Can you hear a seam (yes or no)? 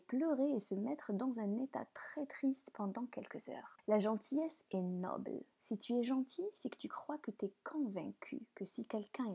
no